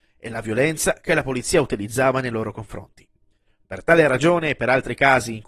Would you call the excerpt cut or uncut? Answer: uncut